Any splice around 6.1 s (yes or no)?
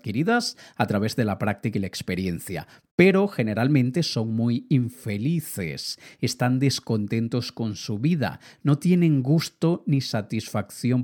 no